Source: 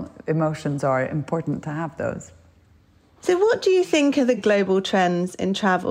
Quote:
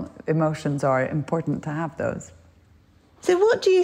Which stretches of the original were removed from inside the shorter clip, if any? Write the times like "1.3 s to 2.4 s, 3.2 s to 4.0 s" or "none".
none